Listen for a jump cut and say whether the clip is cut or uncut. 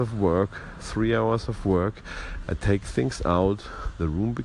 uncut